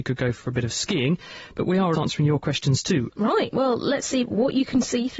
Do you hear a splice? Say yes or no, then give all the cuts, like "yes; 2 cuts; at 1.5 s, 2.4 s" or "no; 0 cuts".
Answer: yes; 2 cuts; at 1.9 s, 3.1 s